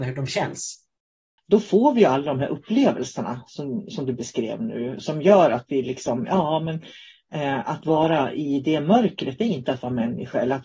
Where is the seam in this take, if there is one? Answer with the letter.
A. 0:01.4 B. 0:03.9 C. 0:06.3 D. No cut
A